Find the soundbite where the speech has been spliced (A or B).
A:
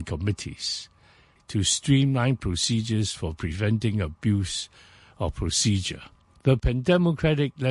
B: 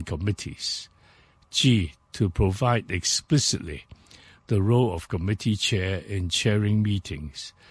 A